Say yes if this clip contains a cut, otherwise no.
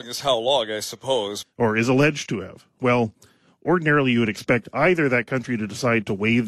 yes